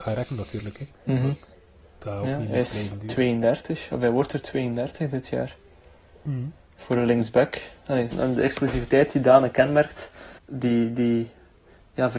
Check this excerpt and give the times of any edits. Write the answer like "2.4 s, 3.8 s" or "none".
8.1 s, 10.4 s